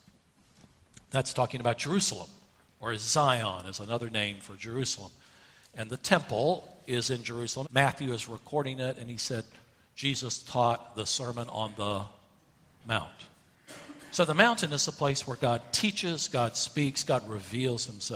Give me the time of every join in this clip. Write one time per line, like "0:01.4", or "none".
0:07.6